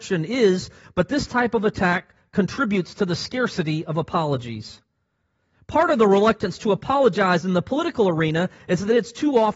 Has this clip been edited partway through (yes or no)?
no